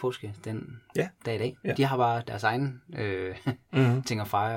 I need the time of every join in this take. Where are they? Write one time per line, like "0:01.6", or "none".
none

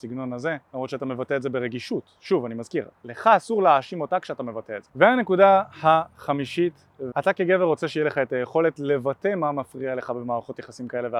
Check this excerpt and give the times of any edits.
0:04.9
0:07.1

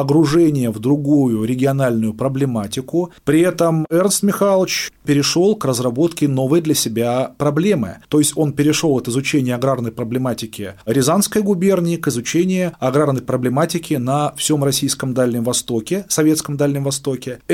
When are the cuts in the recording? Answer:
0:03.1
0:08.0

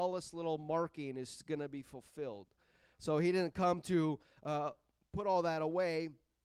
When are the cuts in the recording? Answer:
none

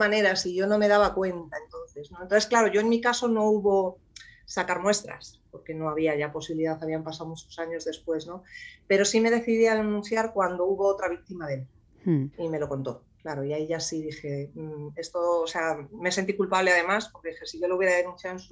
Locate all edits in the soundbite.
0:12.3

